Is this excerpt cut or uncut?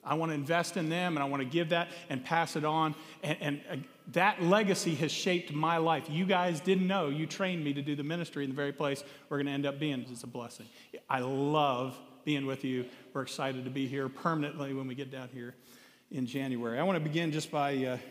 cut